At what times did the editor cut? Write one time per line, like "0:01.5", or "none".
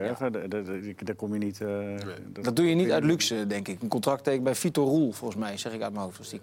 none